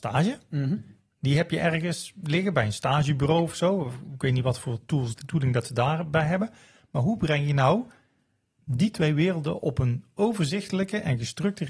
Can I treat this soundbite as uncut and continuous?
yes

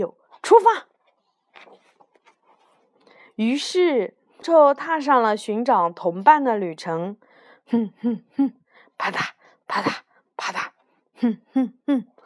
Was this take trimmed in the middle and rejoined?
yes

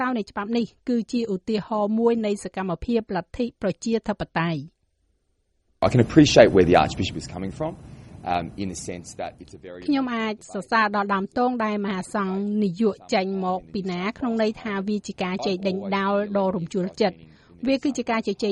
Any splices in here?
yes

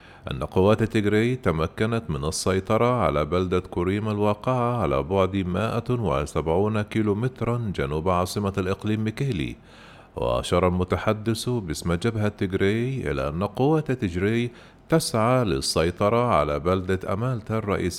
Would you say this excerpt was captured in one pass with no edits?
yes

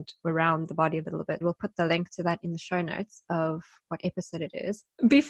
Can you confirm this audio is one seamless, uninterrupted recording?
no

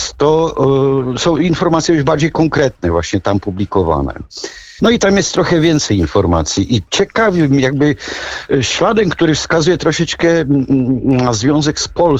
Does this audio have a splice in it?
yes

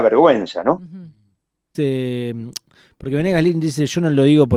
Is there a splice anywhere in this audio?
yes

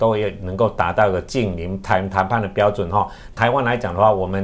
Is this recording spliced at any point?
yes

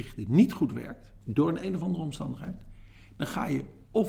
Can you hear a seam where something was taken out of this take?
yes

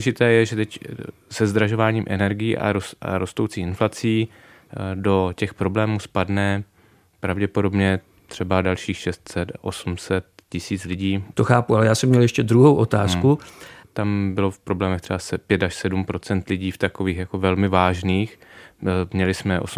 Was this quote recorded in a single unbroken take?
no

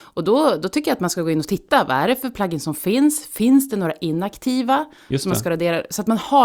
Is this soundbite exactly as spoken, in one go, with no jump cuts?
yes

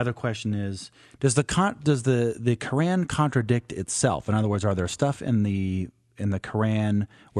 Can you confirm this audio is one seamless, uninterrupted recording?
yes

